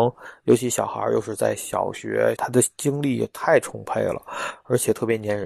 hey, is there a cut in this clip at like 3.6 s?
no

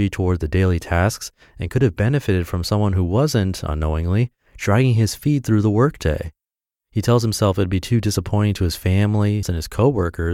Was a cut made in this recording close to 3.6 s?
no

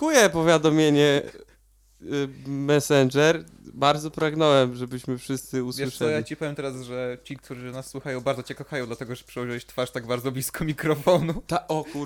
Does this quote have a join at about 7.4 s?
no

